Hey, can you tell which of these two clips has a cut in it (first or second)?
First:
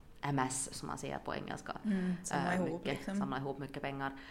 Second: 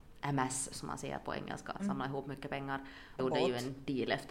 second